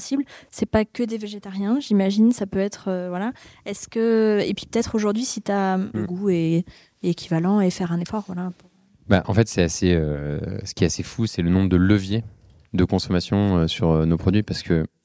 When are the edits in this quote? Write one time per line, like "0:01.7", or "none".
0:05.9